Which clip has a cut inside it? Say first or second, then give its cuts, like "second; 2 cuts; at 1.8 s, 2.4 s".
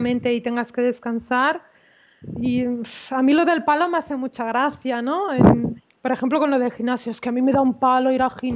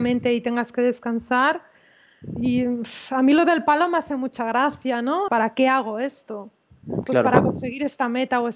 second; 1 cut; at 5.3 s